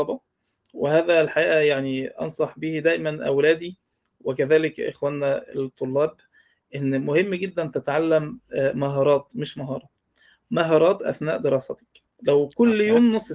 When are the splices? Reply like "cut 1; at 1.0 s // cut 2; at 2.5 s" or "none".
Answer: cut 1; at 12.1 s